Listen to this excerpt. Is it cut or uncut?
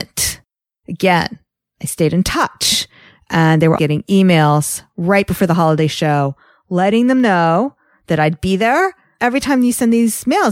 cut